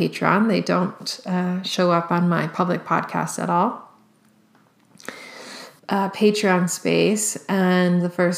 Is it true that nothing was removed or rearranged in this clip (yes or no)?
no